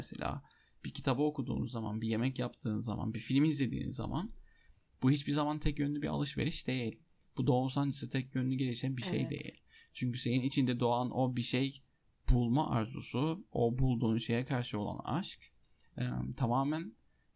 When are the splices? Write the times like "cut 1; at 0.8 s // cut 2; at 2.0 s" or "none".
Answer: none